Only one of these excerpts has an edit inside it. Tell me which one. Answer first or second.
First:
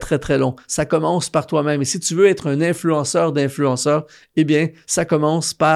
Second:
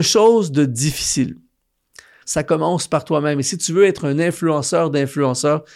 second